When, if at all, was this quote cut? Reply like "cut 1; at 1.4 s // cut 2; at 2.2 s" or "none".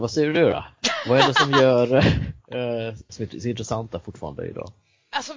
cut 1; at 3.1 s